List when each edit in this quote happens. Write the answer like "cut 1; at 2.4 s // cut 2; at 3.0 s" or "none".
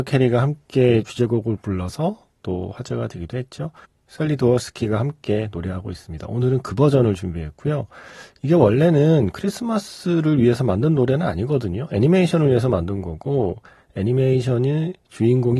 cut 1; at 3.8 s